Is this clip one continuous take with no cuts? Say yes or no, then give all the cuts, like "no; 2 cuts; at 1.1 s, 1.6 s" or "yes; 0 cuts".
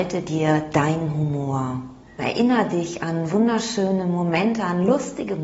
no; 1 cut; at 2.2 s